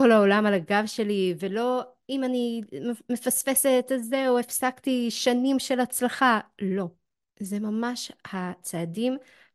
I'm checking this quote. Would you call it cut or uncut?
uncut